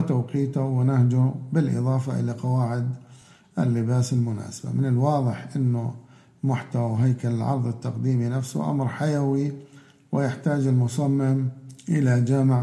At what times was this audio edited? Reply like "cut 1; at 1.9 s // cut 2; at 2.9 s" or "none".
none